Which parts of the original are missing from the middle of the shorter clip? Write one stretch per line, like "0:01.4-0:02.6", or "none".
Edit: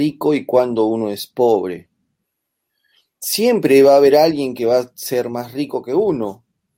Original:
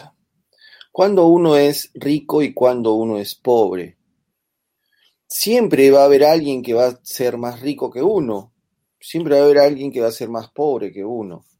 none